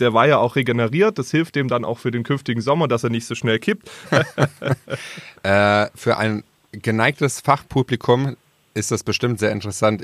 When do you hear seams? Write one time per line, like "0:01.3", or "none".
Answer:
0:04.0